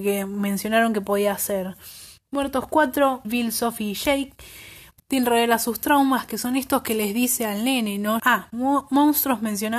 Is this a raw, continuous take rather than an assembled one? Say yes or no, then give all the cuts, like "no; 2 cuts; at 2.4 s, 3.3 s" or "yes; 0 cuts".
no; 3 cuts; at 3.2 s, 5.0 s, 8.2 s